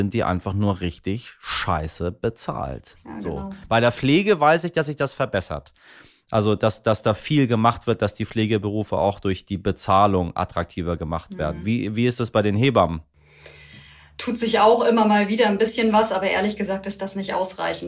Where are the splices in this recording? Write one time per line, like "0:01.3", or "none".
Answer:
none